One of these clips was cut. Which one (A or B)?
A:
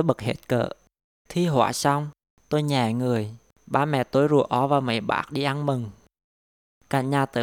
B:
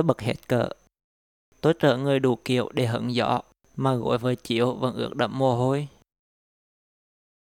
A